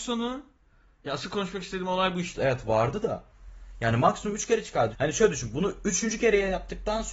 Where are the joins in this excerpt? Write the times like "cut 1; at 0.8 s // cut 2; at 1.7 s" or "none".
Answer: cut 1; at 2.3 s // cut 2; at 4.9 s